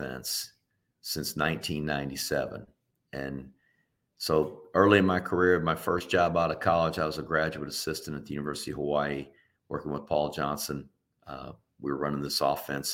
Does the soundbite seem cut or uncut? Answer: uncut